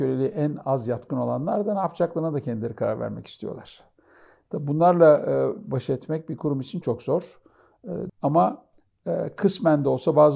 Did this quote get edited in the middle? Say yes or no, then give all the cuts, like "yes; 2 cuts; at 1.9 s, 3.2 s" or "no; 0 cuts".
yes; 2 cuts; at 6.8 s, 8.1 s